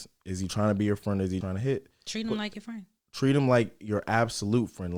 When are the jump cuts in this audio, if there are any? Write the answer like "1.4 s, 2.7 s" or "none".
1.4 s